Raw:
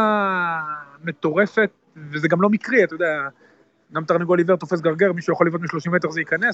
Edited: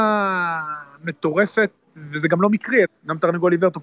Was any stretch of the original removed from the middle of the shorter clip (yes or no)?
yes